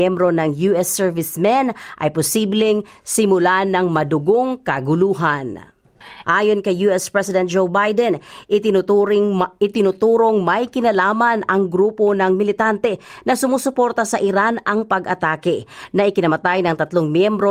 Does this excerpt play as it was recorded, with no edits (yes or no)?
no